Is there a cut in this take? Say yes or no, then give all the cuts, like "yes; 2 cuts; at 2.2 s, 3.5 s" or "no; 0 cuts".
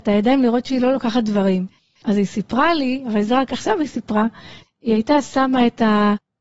yes; 1 cut; at 4.6 s